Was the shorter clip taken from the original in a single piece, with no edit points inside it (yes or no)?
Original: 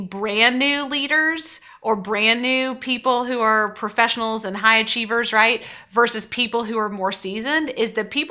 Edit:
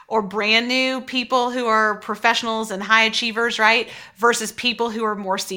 yes